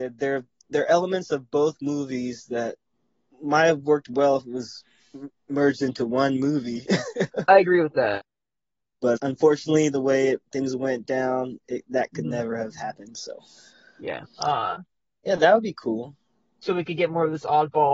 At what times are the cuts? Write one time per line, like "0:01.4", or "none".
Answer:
0:07.5
0:09.2
0:14.2

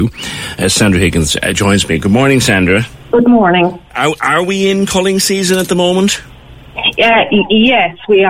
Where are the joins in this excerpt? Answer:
none

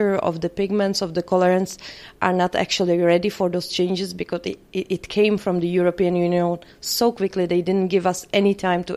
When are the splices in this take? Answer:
none

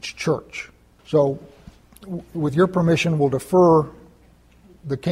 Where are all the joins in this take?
0:01.0

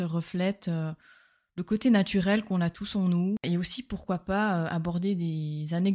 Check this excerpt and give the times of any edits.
none

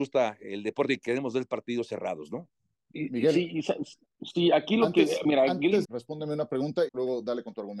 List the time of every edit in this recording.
0:05.8
0:06.9

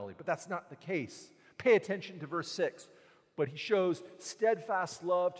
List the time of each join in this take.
none

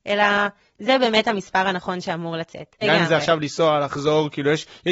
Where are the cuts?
0:02.8

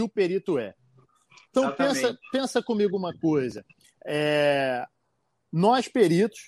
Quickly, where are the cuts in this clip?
none

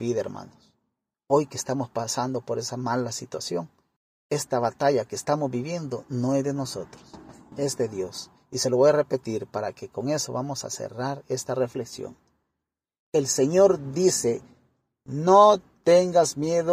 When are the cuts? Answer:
none

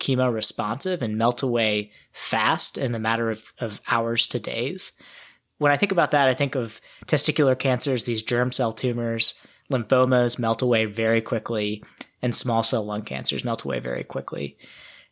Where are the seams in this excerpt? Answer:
none

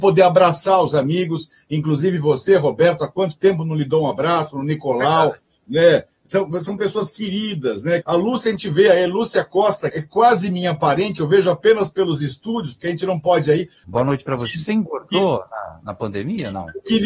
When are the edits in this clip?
0:08.0
0:09.9
0:13.8

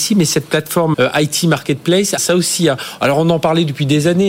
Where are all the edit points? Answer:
0:00.9
0:02.2

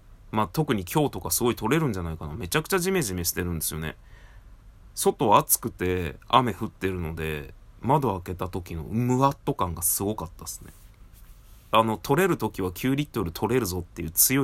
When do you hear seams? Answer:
0:11.7

